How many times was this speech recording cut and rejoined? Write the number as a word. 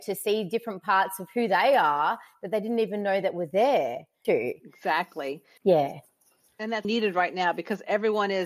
three